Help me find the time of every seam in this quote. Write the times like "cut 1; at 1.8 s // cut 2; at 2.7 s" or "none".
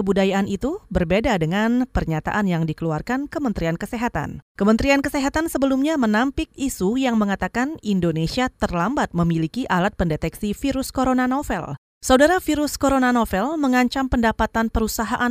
cut 1; at 11.9 s